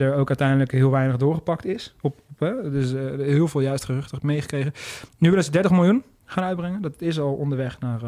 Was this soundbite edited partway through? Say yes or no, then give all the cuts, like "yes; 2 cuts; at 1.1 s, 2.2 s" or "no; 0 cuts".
no; 0 cuts